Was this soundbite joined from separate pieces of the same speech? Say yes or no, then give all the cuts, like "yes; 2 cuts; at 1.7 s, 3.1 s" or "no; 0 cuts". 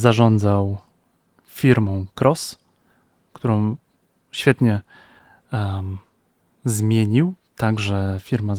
no; 0 cuts